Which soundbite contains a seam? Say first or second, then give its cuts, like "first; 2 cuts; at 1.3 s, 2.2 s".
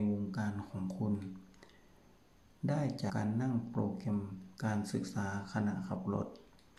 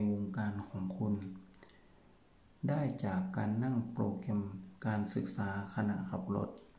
first; 1 cut; at 3.1 s